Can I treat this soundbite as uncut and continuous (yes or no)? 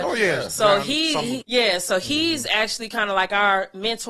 no